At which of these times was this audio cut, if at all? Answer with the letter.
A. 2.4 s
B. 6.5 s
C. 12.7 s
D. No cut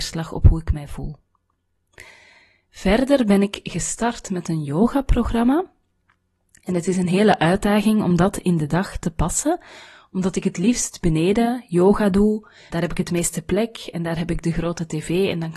C